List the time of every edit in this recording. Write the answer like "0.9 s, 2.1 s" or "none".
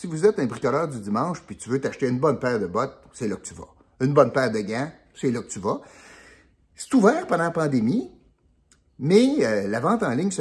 none

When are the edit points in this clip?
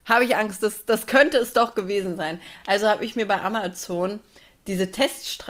none

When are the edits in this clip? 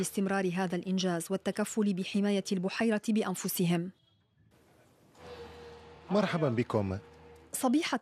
none

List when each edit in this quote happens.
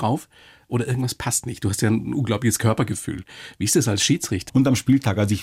4.5 s

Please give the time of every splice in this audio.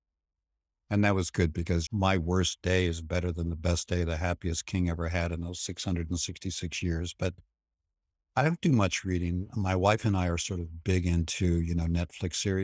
1.9 s

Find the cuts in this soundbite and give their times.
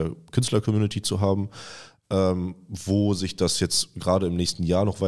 none

